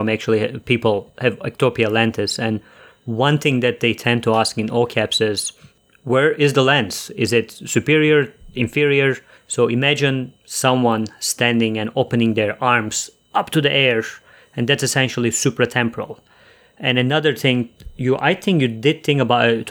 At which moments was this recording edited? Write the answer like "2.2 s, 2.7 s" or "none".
9.4 s